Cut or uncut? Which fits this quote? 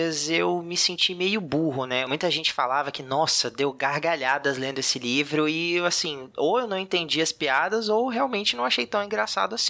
cut